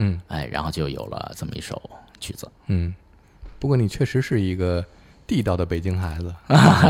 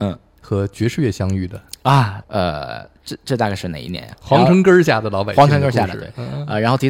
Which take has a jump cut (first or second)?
second